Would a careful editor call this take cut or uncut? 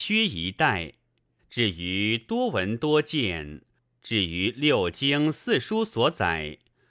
cut